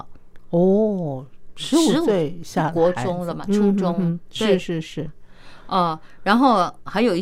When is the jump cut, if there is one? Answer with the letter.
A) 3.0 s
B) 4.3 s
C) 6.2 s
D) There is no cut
D